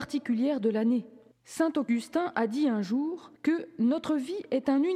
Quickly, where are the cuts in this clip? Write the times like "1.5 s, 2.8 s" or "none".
1.3 s, 3.4 s